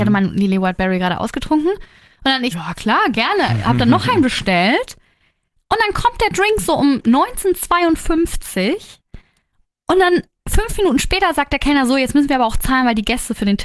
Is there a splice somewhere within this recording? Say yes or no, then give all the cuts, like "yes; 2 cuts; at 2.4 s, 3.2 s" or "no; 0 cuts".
yes; 1 cut; at 2.5 s